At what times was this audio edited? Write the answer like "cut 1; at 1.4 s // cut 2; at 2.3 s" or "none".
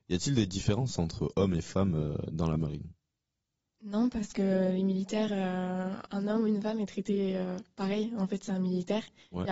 none